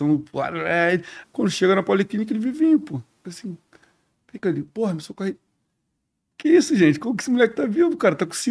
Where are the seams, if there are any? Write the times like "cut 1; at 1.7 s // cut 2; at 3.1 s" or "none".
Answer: cut 1; at 1.2 s // cut 2; at 4.4 s